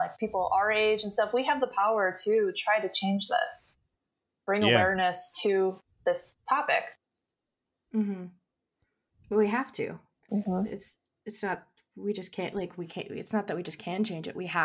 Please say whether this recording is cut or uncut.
uncut